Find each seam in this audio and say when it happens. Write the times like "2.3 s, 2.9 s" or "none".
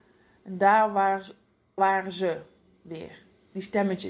1.8 s